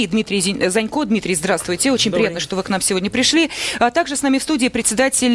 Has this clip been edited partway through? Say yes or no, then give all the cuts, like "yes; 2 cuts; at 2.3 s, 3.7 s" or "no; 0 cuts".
no; 0 cuts